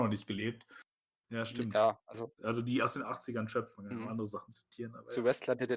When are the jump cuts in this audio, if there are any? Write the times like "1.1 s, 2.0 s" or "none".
1.1 s, 2.4 s